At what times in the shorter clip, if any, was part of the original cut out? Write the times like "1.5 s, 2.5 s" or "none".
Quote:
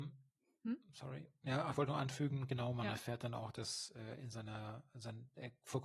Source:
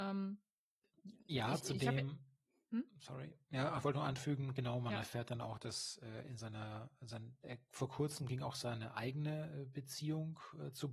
none